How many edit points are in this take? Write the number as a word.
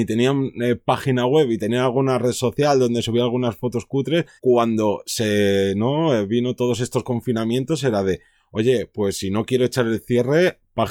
one